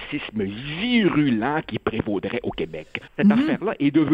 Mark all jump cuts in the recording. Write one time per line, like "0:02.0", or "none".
0:03.1